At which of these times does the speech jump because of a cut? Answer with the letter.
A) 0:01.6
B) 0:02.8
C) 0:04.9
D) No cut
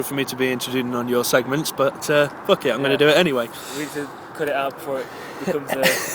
D